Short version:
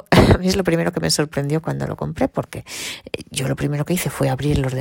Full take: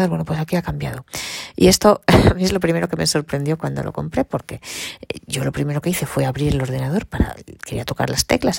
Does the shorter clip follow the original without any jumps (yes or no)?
yes